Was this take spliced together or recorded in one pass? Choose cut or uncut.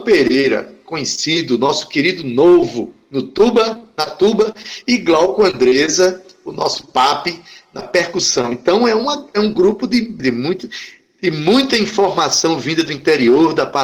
cut